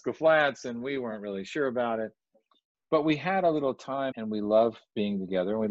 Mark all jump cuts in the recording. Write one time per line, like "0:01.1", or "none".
0:04.1